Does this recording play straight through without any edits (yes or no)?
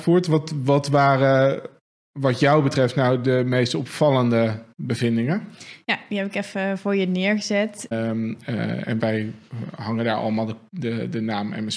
no